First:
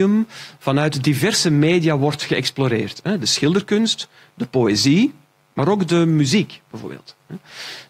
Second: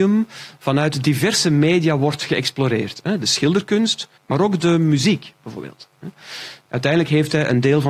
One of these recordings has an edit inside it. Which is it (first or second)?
second